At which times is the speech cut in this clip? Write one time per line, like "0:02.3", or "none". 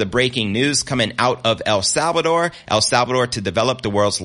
none